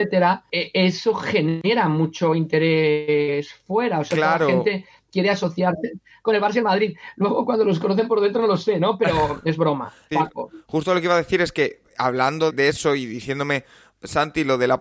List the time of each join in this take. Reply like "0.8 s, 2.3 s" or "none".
10.1 s, 12.5 s